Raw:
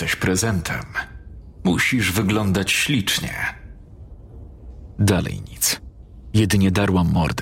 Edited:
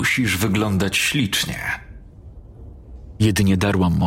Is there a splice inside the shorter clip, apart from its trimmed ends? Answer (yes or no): yes